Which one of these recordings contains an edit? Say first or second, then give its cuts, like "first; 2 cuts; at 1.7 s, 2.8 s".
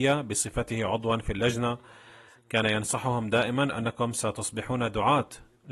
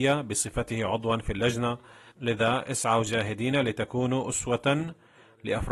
second; 1 cut; at 2.1 s